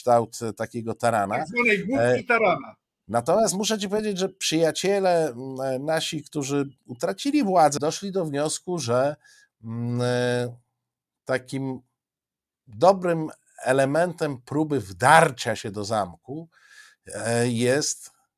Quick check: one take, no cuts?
no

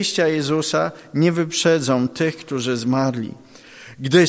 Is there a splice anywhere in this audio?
no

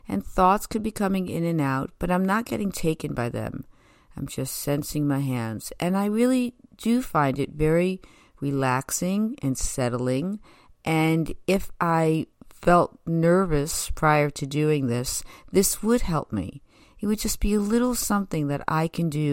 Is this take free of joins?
yes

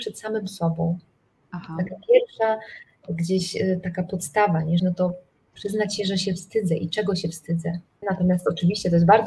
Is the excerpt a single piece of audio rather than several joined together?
no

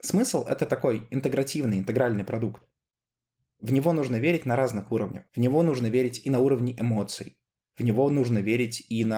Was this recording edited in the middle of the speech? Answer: yes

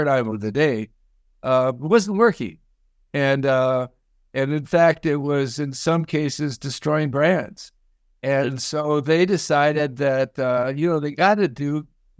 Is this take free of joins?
yes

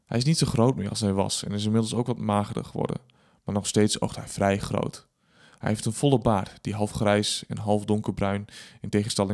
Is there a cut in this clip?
no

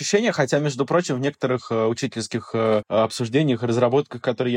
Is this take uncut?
yes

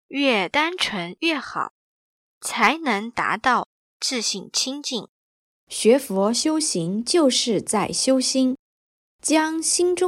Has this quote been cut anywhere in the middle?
yes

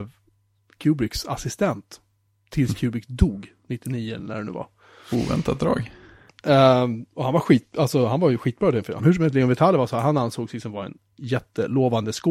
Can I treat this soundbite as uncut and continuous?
no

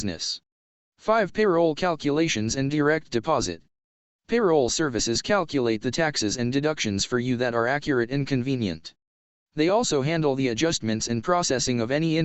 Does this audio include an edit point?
no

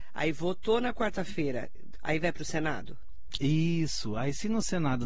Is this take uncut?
no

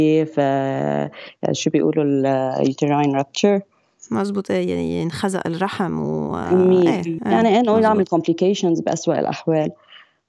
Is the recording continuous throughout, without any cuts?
no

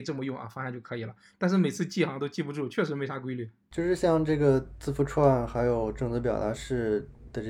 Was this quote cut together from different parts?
no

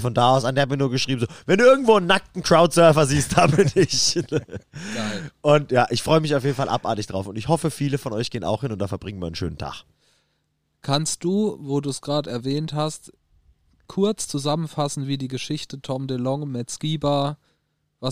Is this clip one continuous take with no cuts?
yes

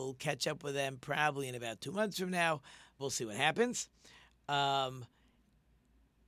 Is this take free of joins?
no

